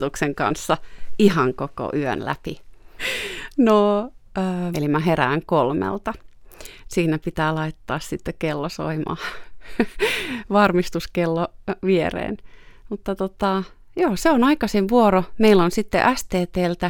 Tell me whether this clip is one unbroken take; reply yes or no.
no